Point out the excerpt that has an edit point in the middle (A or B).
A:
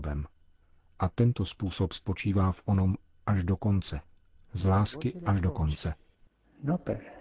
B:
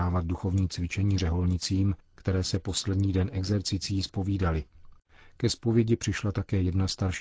A